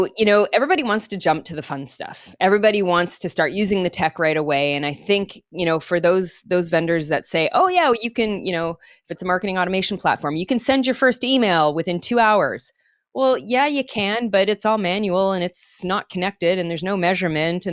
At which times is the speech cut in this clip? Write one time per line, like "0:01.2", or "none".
none